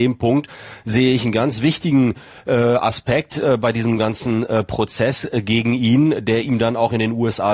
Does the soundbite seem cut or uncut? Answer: uncut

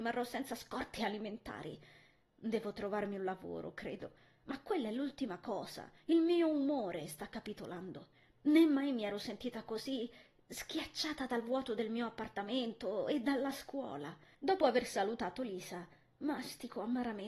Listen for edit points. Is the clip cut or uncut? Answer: cut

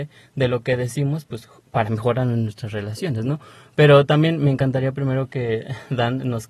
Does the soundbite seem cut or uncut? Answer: uncut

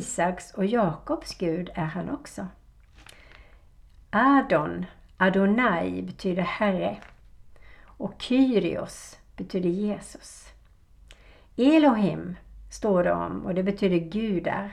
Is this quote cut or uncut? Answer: uncut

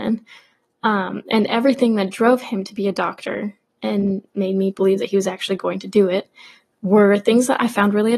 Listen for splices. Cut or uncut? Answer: uncut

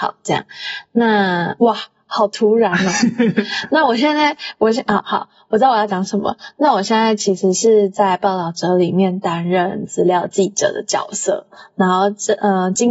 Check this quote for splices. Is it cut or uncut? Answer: uncut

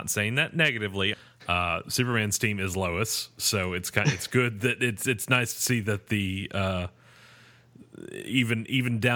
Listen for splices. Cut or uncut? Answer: cut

